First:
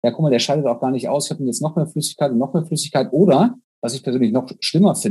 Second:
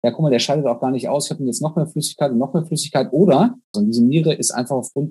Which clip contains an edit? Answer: second; 1 cut; at 3.7 s

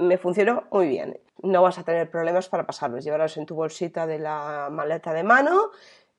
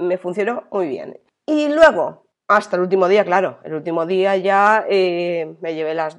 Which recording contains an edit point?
first; 1 cut; at 1.4 s

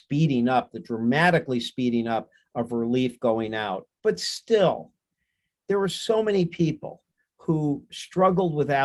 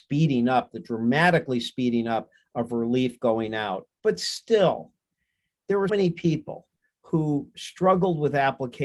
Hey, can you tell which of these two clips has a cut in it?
second; 1 cut; at 5.9 s

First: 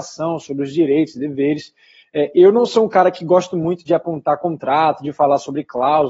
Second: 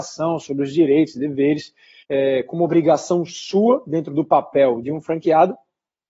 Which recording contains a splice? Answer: second; 1 cut; at 2.0 s

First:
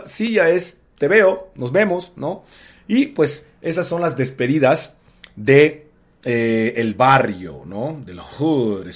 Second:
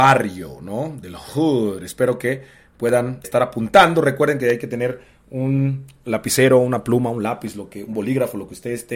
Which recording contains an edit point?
second; 1 cut; at 3.2 s

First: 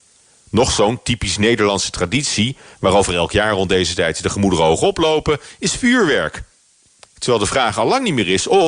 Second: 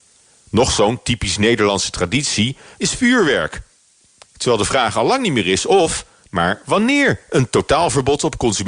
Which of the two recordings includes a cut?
second; 1 cut; at 2.8 s

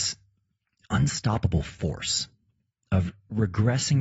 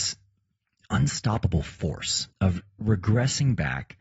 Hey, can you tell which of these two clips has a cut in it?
second; 1 cut; at 2.3 s

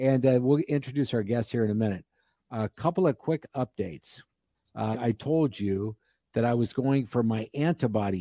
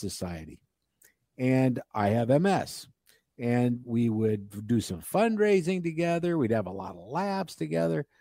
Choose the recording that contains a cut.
first; 1 cut; at 4.9 s

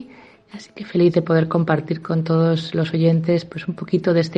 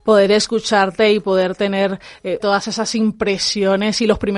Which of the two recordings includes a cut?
second; 1 cut; at 2.4 s

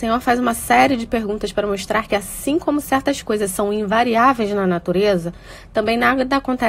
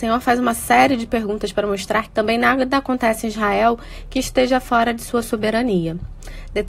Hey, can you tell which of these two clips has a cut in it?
second; 1 cut; at 2.1 s

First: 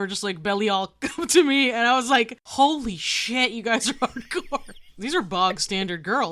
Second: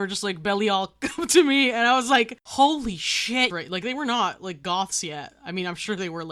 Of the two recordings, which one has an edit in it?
second; 1 cut; at 3.5 s

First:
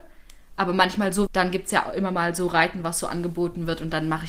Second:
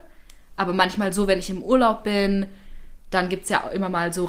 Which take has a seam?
first; 1 cut; at 1.3 s

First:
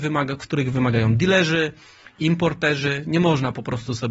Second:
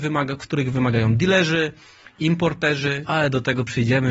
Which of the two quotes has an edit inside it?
second; 1 cut; at 3.1 s

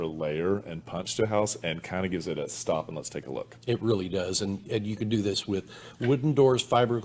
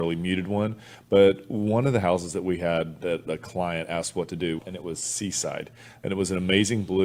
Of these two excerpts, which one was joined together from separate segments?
second; 1 cut; at 4.6 s

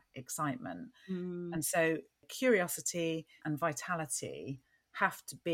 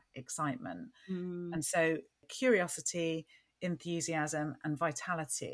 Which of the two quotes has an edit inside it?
first; 1 cut; at 3.4 s

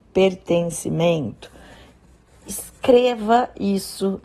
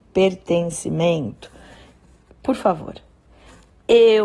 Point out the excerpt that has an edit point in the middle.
second; 1 cut; at 2.3 s

